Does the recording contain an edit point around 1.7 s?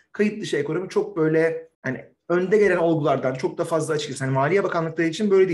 yes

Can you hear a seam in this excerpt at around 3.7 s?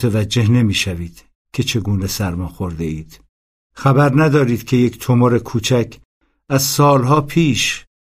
yes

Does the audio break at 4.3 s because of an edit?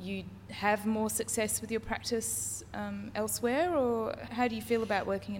yes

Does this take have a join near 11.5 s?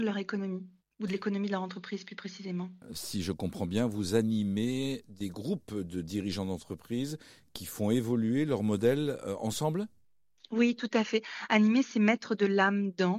yes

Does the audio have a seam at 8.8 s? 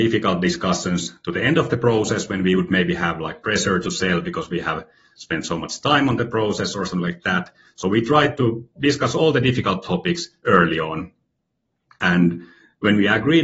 yes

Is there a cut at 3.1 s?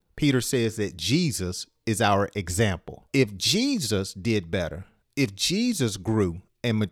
yes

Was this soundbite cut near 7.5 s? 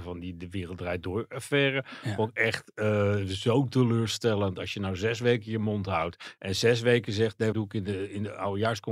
yes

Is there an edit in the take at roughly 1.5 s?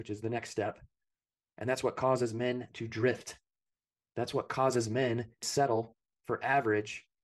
no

